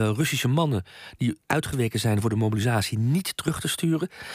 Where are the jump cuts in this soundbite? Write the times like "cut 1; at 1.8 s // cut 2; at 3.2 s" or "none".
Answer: cut 1; at 1.4 s